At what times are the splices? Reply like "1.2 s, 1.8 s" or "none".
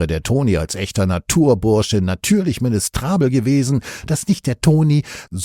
4.1 s